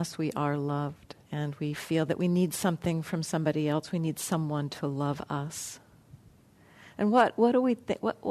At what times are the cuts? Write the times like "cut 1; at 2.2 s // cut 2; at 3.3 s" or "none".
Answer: cut 1; at 1.2 s